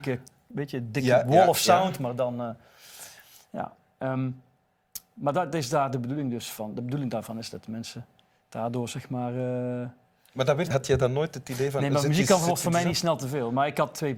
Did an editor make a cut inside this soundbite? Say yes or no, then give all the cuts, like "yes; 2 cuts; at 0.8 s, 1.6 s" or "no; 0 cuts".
yes; 1 cut; at 10.7 s